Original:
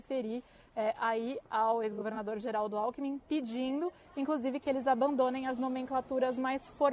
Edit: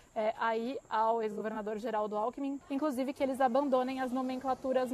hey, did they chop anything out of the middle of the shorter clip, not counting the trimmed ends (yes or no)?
yes